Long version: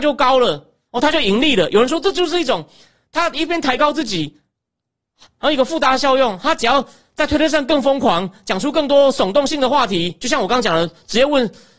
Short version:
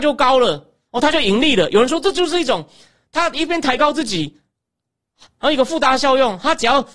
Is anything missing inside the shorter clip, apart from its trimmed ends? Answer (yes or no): no